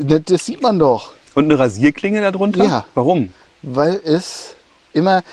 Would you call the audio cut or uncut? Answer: uncut